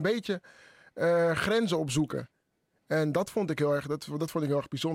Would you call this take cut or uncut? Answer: uncut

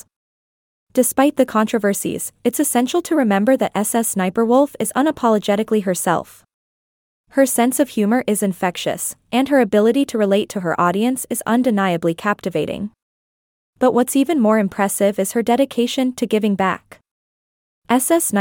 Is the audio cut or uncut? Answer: uncut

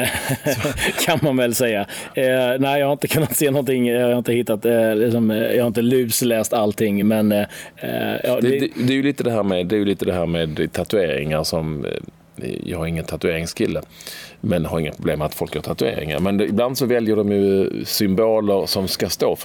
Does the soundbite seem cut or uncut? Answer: uncut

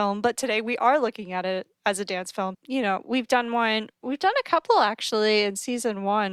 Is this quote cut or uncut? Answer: cut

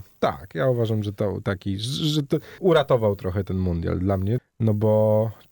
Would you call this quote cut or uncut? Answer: cut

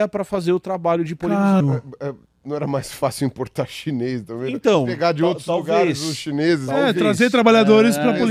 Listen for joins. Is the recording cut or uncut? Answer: cut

